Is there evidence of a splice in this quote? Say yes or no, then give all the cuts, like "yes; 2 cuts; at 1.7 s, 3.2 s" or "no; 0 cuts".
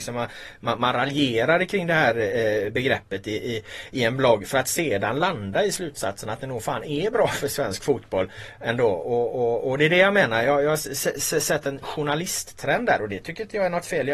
no; 0 cuts